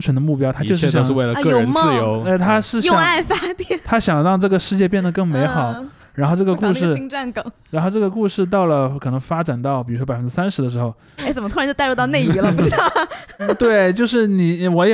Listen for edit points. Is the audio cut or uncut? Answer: cut